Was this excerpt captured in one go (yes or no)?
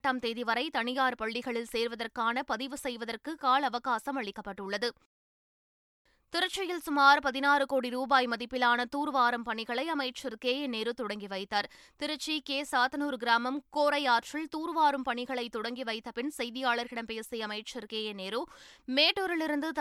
yes